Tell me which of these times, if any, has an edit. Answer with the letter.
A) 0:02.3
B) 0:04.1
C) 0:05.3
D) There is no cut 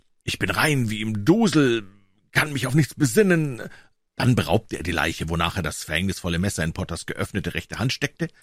B